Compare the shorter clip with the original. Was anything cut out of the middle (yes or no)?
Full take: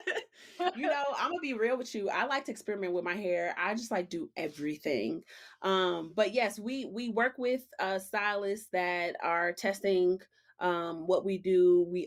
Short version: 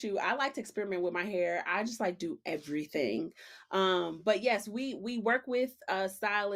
no